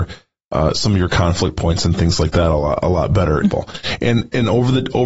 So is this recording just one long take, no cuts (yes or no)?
no